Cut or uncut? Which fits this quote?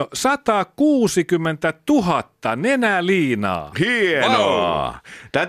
uncut